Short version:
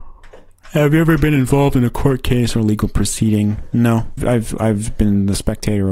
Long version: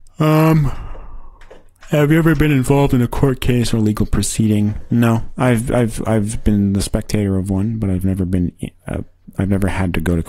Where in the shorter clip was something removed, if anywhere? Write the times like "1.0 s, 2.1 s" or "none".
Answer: 4.2 s